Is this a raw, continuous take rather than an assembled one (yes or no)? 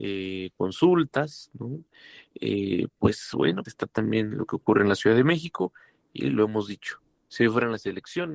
no